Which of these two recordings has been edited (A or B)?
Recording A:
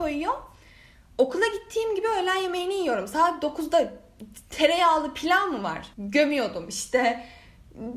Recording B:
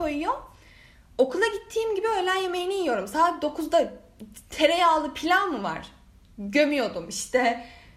A